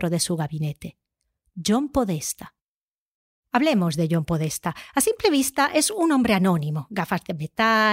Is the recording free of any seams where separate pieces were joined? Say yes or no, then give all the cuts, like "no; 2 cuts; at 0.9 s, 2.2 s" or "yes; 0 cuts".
yes; 0 cuts